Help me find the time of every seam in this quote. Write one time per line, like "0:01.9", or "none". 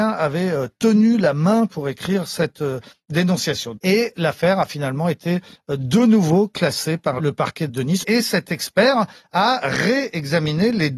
0:03.8
0:08.0